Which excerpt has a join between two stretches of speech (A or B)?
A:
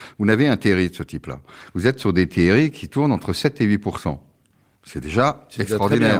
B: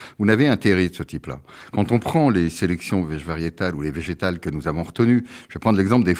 A